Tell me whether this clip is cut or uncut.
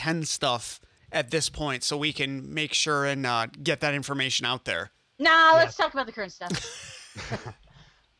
cut